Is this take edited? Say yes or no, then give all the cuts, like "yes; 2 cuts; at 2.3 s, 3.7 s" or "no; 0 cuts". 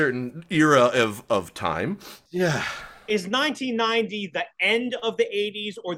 yes; 1 cut; at 2.3 s